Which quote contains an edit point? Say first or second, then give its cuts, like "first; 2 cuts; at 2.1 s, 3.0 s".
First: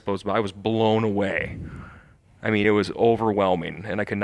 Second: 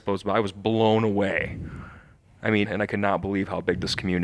second; 1 cut; at 2.6 s